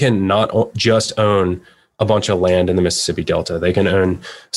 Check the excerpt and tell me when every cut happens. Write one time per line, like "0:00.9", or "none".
none